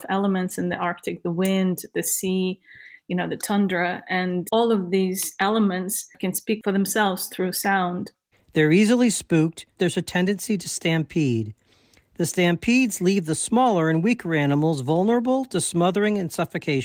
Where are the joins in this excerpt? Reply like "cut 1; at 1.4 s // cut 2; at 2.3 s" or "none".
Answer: cut 1; at 8.3 s // cut 2; at 9.7 s